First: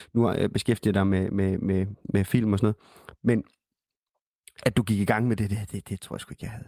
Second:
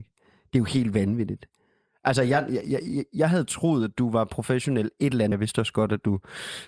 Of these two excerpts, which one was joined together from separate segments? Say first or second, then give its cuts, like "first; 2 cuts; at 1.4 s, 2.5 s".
second; 1 cut; at 5.3 s